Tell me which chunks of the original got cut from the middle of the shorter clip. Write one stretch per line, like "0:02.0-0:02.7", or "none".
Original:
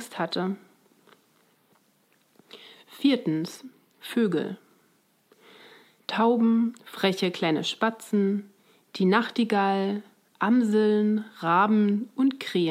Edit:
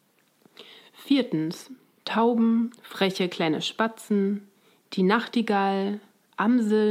0:03.9-0:06.0